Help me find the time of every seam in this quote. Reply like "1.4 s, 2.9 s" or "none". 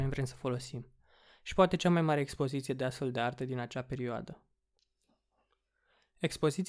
none